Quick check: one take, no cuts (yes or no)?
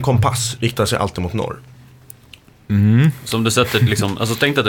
yes